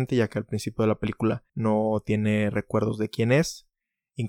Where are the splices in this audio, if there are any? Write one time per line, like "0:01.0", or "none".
0:01.5